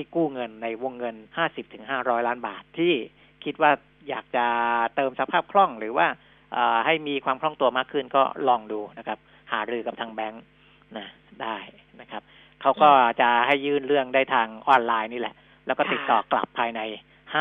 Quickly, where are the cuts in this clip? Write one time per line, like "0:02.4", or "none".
0:01.3